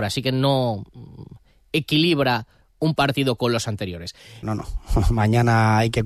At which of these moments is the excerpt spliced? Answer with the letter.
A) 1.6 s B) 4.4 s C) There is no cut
B